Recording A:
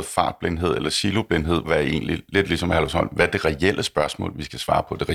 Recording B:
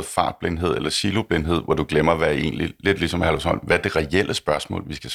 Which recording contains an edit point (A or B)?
A